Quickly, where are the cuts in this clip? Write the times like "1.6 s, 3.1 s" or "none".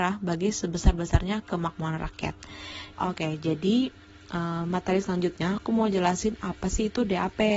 2.9 s